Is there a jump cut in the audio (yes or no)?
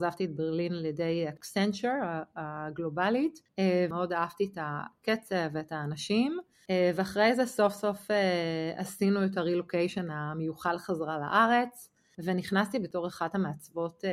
yes